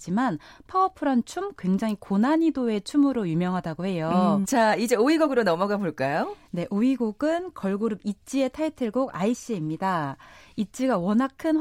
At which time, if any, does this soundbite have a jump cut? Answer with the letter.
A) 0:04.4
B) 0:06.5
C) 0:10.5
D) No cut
A